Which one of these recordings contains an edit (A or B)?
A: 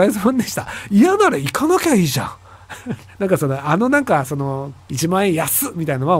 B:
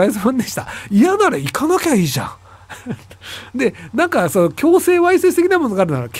A